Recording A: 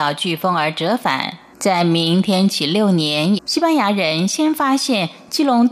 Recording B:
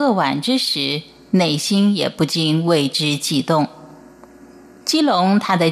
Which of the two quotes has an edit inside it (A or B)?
A